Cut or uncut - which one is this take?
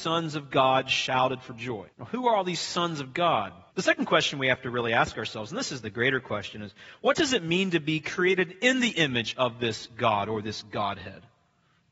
cut